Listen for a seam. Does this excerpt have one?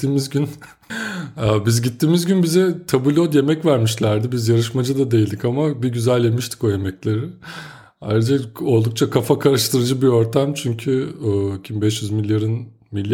no; 0 cuts

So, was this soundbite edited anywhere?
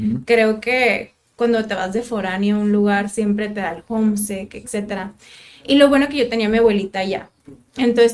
no; 0 cuts

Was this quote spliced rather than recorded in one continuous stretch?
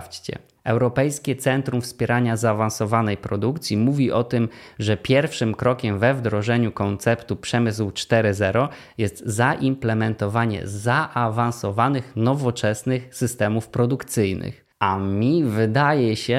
yes; 1 cut; at 14.7 s

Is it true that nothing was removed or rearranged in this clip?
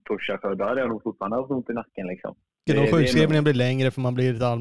no; 1 cut; at 2.7 s

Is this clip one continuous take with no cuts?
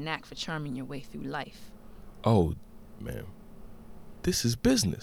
no; 1 cut; at 3.0 s

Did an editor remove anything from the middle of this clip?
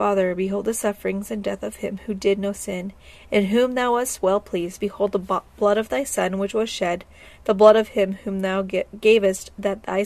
no; 0 cuts

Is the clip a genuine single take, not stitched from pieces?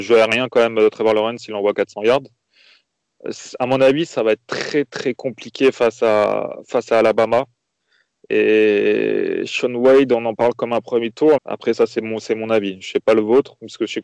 no; 2 cuts; at 4.9 s, 11.4 s

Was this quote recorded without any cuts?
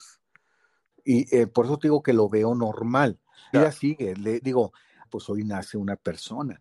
no; 3 cuts; at 0.9 s, 3.5 s, 5.0 s

